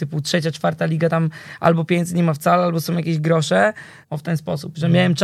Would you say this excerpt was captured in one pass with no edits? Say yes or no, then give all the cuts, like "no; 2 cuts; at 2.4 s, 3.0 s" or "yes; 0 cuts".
no; 1 cut; at 4.0 s